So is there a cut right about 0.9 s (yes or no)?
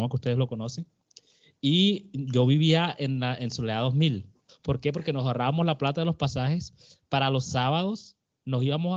no